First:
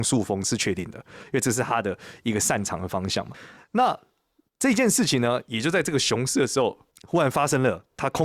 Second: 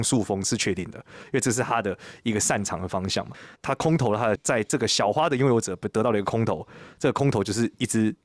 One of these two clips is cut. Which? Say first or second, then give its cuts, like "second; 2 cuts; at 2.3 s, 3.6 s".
second; 1 cut; at 3.5 s